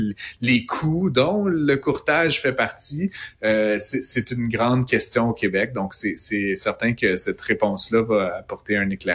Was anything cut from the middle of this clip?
no; 0 cuts

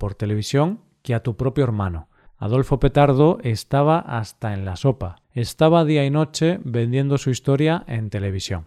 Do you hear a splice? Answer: yes; 2 cuts; at 2.3 s, 5.2 s

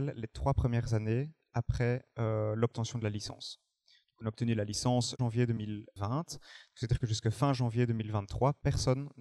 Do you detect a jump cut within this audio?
no; 0 cuts

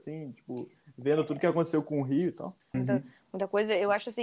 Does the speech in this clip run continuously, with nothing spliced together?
no; 1 cut; at 2.7 s

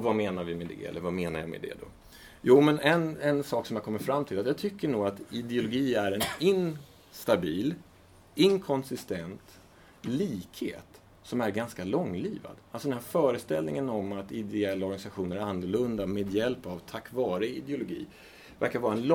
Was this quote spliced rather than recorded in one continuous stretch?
no; 0 cuts

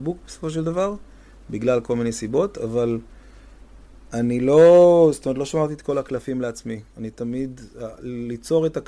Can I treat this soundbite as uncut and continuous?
yes; 0 cuts

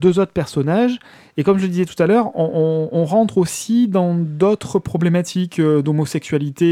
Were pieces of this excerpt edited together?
no; 0 cuts

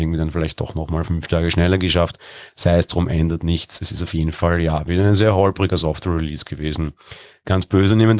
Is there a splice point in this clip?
no; 0 cuts

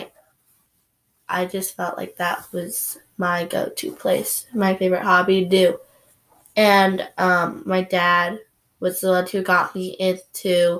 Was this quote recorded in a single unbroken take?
yes; 0 cuts

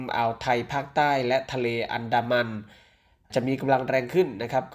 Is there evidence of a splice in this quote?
no; 0 cuts

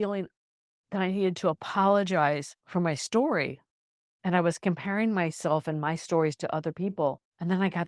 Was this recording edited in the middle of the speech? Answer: no; 0 cuts

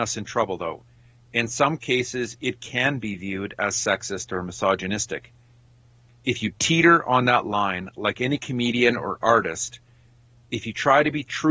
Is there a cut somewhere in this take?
no; 0 cuts

